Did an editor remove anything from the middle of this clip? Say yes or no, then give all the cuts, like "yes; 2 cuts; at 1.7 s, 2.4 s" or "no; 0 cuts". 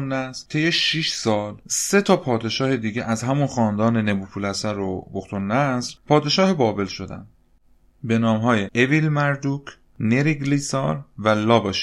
no; 0 cuts